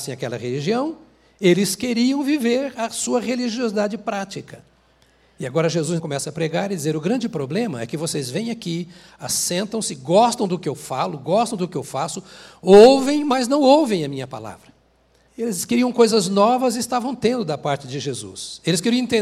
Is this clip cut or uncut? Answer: cut